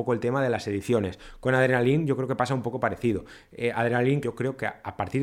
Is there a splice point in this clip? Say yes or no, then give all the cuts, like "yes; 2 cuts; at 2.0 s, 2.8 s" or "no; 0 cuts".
yes; 1 cut; at 4.2 s